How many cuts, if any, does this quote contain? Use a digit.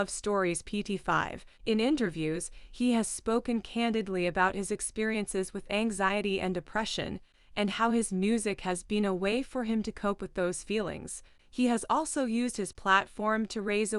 1